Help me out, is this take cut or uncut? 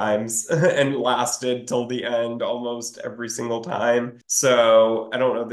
cut